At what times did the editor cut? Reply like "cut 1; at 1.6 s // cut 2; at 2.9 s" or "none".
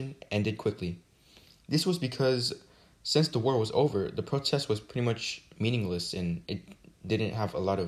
none